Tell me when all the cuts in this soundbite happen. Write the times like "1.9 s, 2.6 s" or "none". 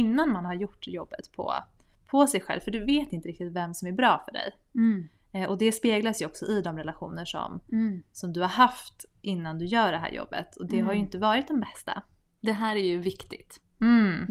12.2 s

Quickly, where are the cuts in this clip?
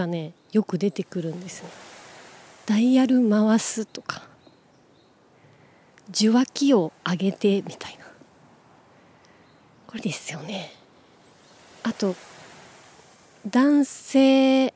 10.0 s

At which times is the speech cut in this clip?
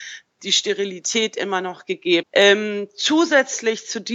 2.2 s

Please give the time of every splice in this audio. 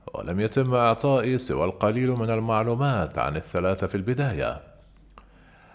none

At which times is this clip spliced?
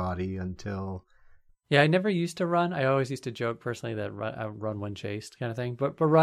1.5 s

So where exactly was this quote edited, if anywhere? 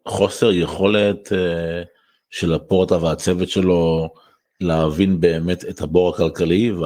none

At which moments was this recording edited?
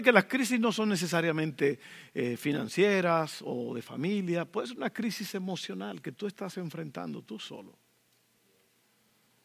none

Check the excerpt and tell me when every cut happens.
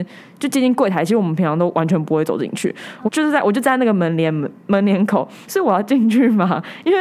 3.1 s, 5.4 s

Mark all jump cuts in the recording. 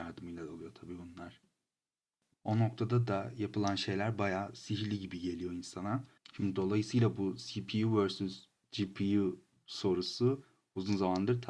2.3 s, 6.2 s

